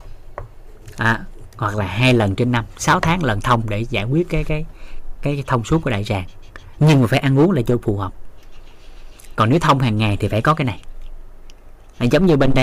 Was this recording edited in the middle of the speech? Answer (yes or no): no